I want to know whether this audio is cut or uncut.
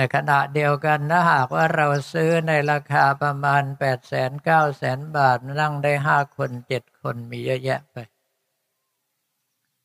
cut